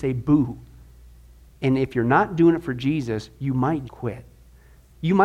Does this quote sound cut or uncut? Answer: cut